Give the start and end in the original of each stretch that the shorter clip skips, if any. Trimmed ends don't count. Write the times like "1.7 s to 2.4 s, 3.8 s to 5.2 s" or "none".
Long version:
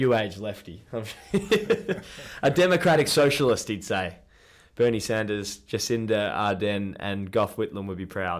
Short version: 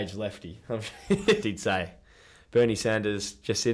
1.6 s to 3.6 s

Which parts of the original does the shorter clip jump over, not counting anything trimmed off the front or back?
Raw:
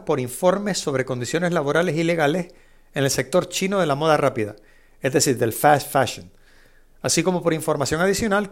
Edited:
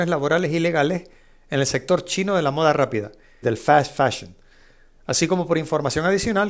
4.9 s to 5.4 s

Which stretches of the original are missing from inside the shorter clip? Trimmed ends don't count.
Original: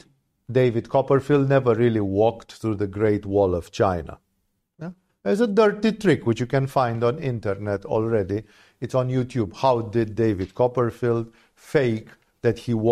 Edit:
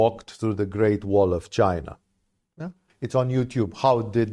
5.1 s to 8.7 s

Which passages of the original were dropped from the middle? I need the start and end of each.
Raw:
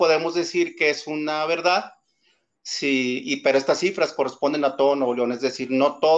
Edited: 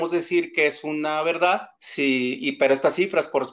2.0 s to 2.6 s

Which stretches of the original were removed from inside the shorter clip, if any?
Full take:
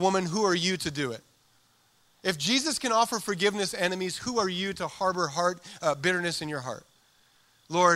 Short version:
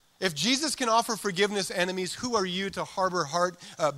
none

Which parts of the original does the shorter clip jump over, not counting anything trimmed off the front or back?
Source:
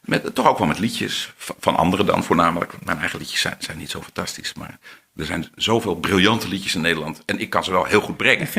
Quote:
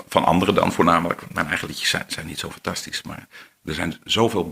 none

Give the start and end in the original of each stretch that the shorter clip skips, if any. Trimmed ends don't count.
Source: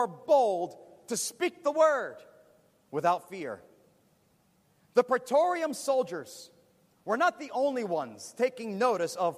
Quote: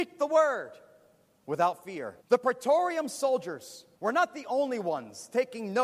3.7 s to 4.9 s, 6.6 s to 7.0 s

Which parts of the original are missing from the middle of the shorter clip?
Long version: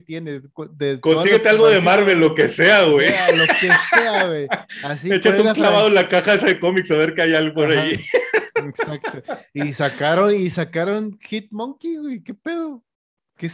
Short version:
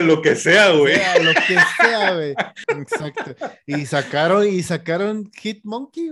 4.8 s to 8.5 s

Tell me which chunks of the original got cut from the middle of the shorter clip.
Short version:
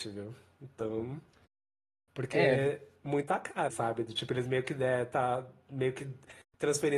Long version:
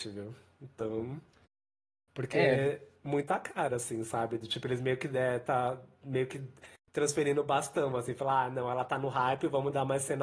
3.7 s to 4.0 s

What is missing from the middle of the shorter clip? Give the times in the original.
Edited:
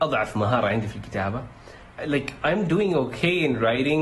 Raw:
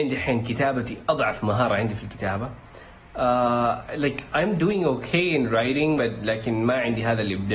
3.1 s to 3.9 s

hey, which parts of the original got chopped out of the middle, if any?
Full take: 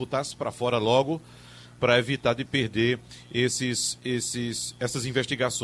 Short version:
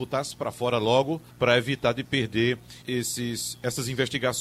1.3 s to 1.7 s, 3.2 s to 4.0 s

